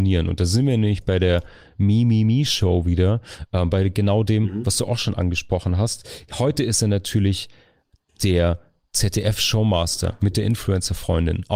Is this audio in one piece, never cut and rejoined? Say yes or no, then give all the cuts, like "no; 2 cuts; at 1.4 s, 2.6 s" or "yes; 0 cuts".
yes; 0 cuts